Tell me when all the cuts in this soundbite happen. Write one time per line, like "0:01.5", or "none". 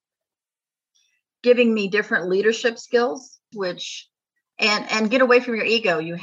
0:03.5